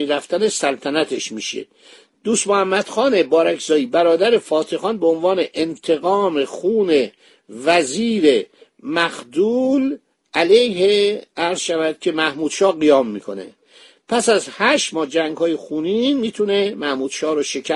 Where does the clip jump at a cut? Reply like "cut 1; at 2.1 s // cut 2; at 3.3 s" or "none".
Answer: none